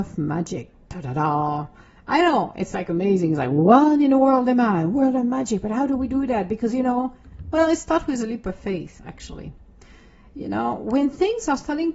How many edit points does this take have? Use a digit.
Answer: 0